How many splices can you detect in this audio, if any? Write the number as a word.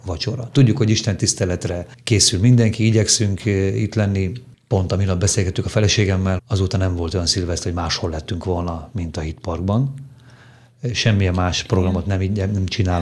one